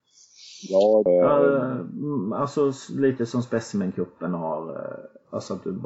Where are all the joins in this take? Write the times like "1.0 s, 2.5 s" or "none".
1.1 s

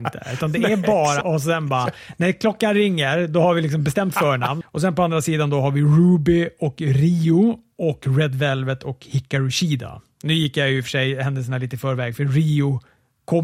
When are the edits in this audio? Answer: 1.2 s, 4.6 s

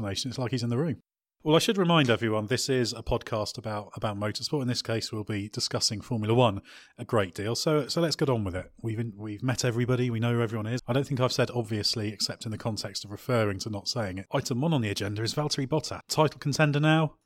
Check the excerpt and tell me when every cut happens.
10.8 s, 14.3 s, 16.0 s

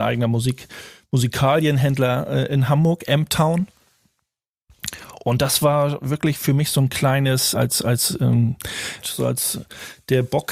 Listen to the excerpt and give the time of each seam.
7.5 s, 9.0 s

